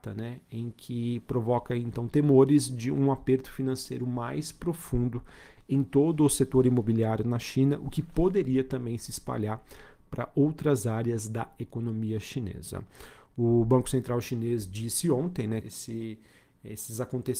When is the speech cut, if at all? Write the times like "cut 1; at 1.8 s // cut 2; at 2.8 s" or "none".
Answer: cut 1; at 15.6 s